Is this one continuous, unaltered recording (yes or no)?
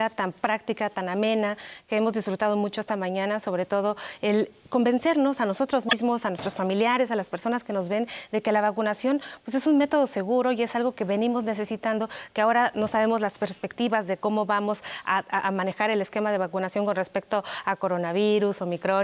yes